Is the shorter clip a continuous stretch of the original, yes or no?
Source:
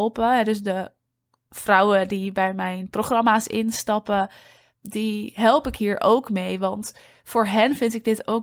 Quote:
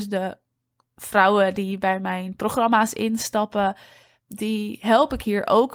yes